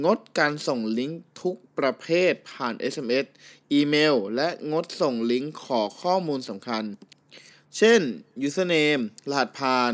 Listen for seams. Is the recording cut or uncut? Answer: uncut